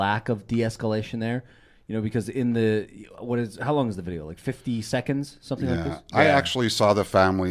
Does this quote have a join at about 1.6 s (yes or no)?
no